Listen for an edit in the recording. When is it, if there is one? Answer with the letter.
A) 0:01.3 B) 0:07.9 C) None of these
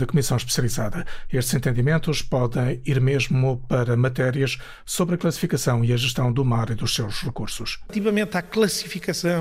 C